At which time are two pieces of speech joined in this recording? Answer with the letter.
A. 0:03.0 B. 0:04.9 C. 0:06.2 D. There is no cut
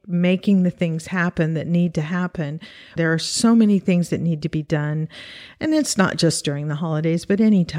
A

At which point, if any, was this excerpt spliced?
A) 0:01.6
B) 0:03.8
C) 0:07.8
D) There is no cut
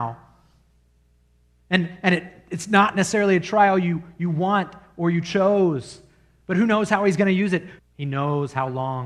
C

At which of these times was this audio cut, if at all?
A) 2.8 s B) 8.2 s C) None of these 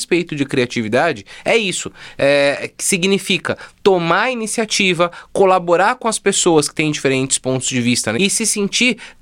B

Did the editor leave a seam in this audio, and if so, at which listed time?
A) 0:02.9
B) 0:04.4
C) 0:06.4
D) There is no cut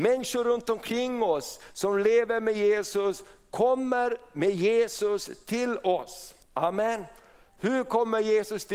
C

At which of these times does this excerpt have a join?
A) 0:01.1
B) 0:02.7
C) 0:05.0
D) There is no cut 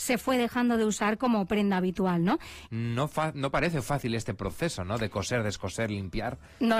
B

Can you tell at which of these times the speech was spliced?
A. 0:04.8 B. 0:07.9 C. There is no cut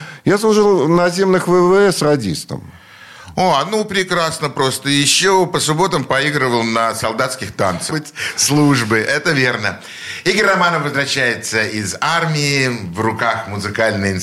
B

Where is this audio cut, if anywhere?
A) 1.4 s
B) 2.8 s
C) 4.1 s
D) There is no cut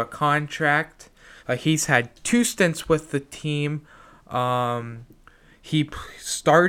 A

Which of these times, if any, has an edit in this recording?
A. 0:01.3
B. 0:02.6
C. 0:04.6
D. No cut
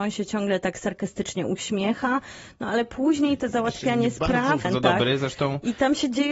C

